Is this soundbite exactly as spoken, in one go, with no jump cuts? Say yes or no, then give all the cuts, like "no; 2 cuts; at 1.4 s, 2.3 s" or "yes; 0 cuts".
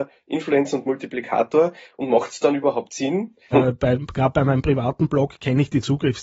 no; 1 cut; at 3.5 s